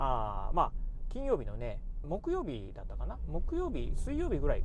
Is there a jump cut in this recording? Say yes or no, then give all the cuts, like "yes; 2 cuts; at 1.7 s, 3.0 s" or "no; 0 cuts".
yes; 1 cut; at 2.0 s